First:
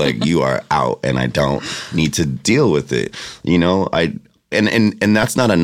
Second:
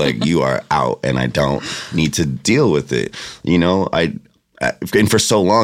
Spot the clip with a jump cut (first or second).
first